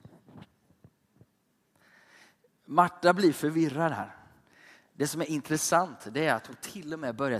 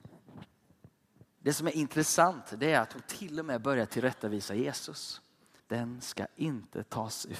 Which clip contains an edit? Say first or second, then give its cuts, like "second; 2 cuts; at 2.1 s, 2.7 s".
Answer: second; 2 cuts; at 1.4 s, 5.6 s